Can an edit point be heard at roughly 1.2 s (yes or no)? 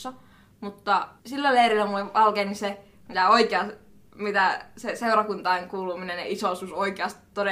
yes